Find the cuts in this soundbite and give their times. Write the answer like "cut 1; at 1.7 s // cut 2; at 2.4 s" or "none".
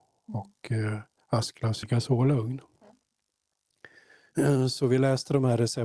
cut 1; at 1.8 s